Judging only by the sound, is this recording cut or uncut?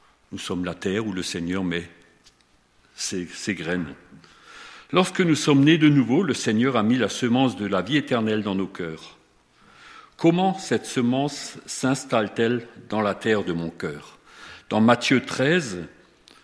uncut